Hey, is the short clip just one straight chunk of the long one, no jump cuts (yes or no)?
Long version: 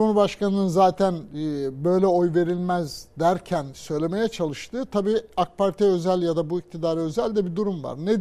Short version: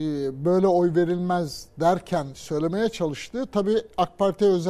yes